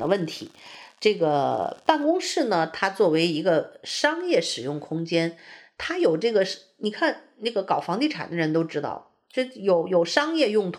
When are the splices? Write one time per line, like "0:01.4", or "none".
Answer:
none